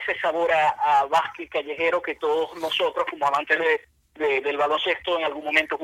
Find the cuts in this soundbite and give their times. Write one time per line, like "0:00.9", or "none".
none